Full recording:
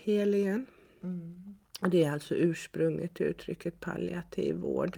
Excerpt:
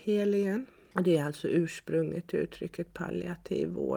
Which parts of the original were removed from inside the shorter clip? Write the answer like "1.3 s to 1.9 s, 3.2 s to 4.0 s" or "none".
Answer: 0.9 s to 1.8 s